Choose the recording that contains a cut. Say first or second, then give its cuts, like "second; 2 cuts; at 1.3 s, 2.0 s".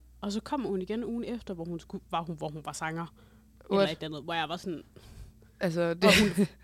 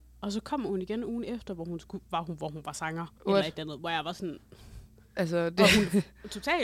second; 1 cut; at 3.2 s